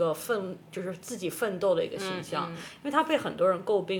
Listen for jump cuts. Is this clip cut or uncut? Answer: uncut